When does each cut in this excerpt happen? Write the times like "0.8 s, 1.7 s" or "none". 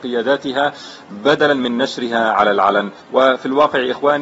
3.0 s